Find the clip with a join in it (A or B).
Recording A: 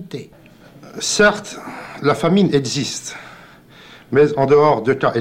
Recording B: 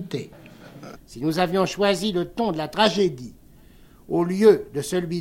B